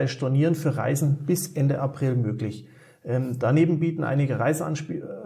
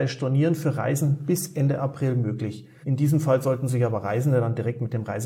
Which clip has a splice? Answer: second; 1 cut; at 2.8 s

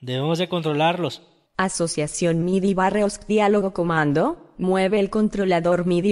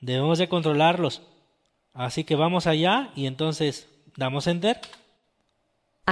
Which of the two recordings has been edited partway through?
first; 1 cut; at 1.5 s

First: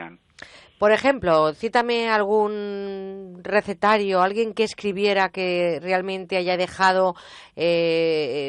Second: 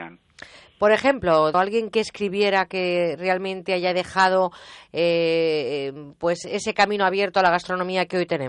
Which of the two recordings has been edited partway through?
second; 1 cut; at 1.5 s

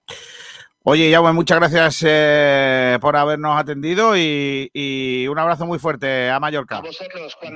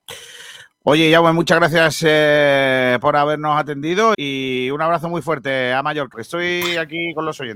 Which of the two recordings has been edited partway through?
second; 2 cuts; at 4.1 s, 6.1 s

